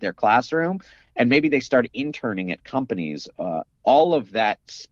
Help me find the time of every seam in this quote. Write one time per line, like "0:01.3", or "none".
none